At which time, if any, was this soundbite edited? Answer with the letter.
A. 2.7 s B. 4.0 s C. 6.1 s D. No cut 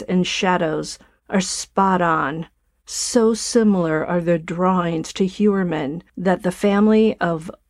C